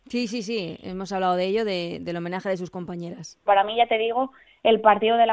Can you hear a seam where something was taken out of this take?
yes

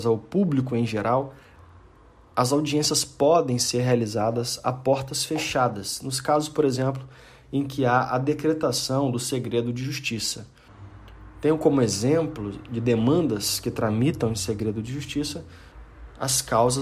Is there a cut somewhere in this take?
no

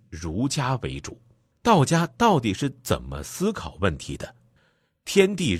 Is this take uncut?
no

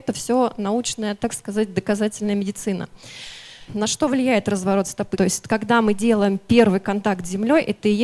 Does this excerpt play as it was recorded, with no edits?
no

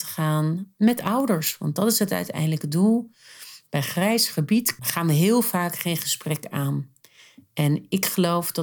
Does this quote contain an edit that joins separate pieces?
yes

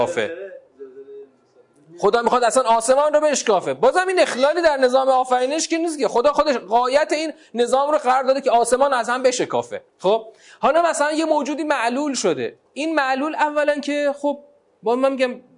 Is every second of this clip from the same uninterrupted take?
no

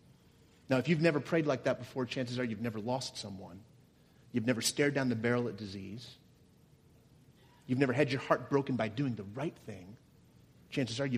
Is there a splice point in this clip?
no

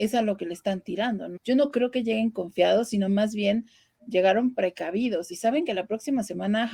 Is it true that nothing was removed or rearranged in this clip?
no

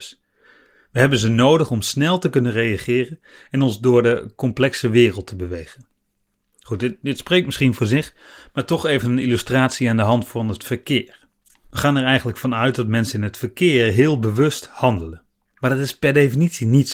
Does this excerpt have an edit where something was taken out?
no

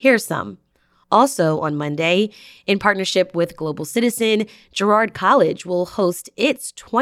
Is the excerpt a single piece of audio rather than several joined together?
no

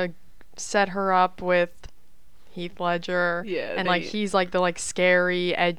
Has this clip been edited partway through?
no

